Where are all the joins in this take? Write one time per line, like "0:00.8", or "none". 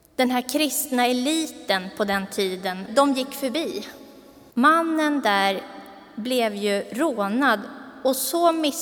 0:02.9
0:04.5